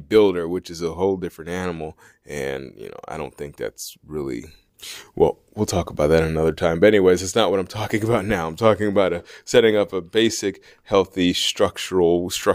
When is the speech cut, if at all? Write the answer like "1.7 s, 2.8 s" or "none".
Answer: none